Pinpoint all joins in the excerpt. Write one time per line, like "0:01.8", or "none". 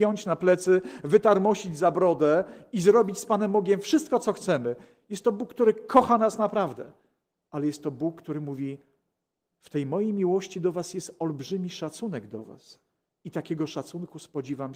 none